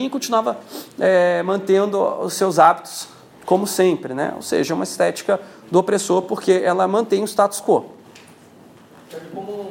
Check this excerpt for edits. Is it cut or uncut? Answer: uncut